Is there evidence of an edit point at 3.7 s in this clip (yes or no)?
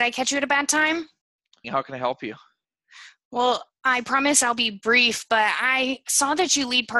no